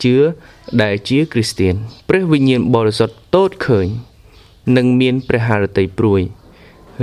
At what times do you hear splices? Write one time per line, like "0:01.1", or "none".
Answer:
0:02.0